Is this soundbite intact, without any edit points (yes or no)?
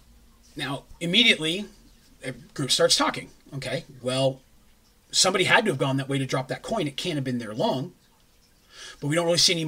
yes